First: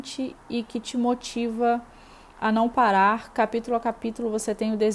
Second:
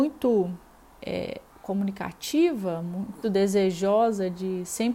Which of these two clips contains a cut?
second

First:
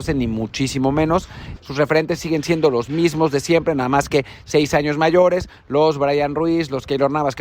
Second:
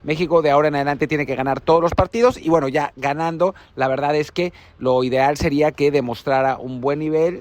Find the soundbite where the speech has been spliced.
first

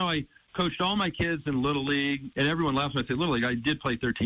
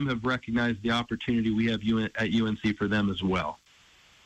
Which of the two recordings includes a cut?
first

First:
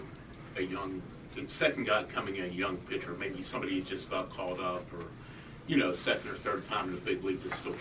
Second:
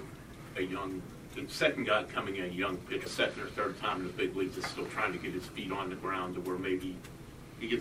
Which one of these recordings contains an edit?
second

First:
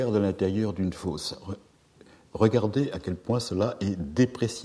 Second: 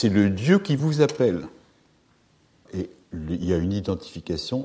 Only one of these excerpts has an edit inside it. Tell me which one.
second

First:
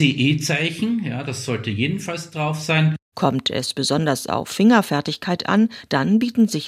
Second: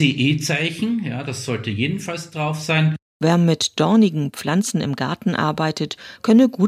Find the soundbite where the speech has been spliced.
first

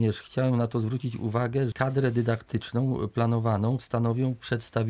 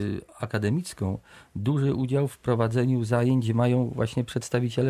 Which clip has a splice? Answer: first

